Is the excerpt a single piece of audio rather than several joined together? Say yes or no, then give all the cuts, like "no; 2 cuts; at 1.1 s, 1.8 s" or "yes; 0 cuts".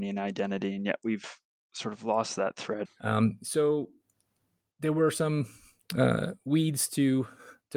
no; 1 cut; at 2.8 s